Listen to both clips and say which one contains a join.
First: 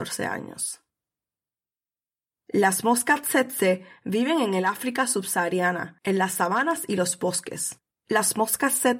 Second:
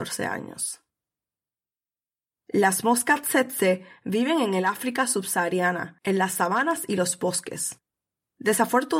first; 1 cut; at 7.9 s

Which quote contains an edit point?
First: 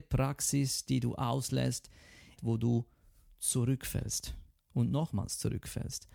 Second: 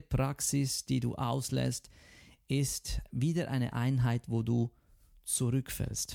first; 1 cut; at 2.4 s

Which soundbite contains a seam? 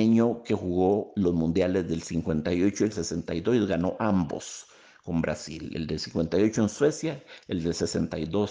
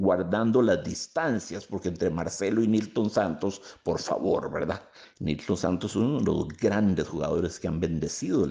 second; 1 cut; at 5.0 s

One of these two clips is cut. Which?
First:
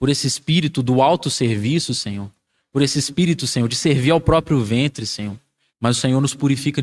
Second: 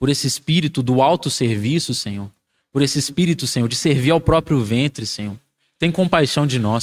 first; 1 cut; at 5.7 s

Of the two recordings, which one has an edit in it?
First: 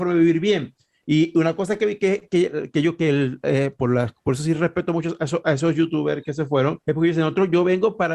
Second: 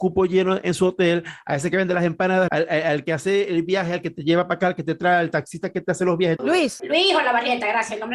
second; 2 cuts; at 2.5 s, 6.4 s

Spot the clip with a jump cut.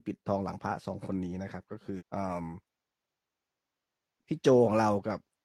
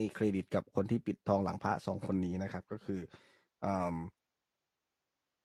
first; 1 cut; at 2.0 s

